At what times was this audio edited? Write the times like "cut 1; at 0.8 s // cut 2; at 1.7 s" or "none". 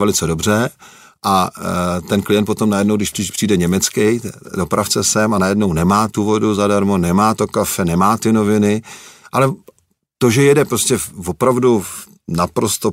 none